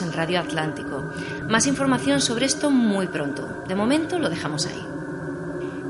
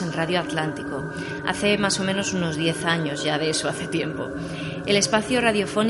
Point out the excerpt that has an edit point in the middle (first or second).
first